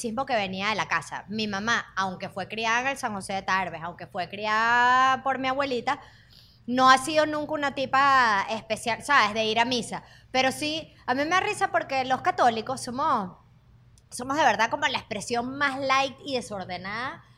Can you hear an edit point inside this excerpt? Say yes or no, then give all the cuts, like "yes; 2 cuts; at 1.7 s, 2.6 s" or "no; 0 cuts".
no; 0 cuts